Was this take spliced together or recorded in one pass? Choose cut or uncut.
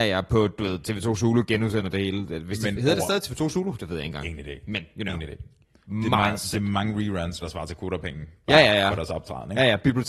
cut